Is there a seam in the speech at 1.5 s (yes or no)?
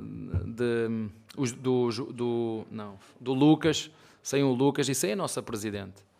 no